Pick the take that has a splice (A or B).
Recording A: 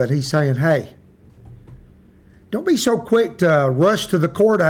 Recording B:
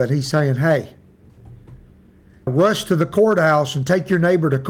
B